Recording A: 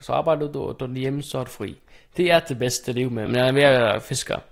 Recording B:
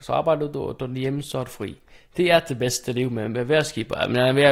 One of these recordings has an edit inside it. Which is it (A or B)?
A